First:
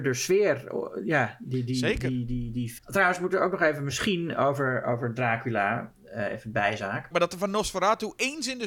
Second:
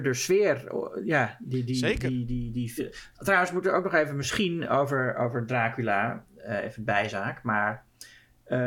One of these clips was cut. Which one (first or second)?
first